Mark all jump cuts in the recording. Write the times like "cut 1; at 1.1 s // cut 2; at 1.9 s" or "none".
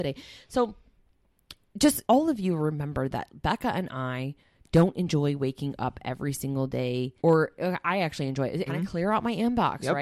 cut 1; at 2.0 s // cut 2; at 7.2 s // cut 3; at 8.7 s